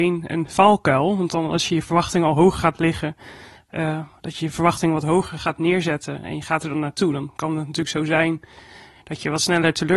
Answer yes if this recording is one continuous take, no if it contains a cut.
yes